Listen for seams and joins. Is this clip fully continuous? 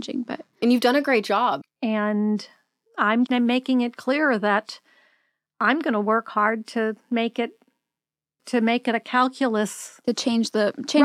no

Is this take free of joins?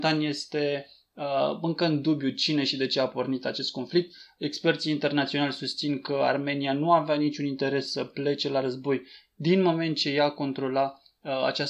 yes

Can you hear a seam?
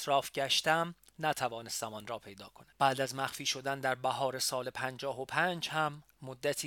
yes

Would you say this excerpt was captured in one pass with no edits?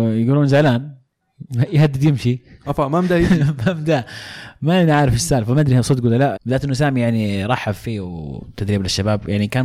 no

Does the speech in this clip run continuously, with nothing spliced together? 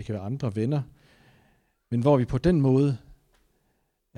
yes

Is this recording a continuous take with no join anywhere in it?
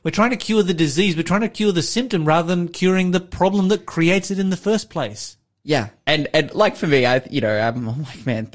yes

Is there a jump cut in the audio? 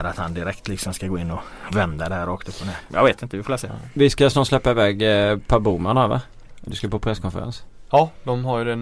yes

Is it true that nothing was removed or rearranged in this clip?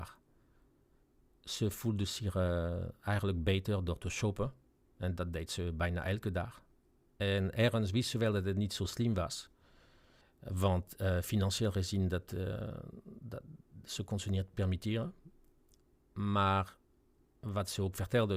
yes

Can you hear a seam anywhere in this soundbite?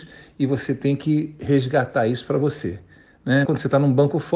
yes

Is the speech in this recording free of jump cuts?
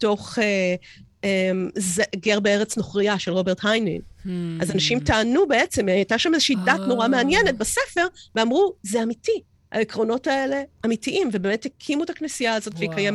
yes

